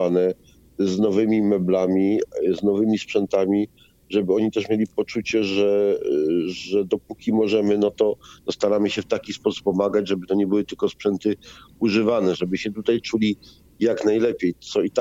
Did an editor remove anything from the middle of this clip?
no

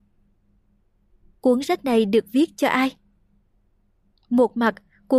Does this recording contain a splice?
no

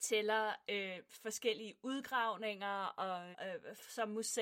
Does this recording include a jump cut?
yes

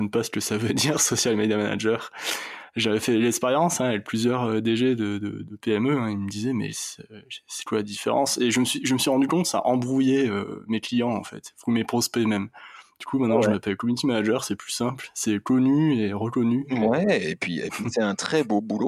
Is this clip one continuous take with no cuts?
yes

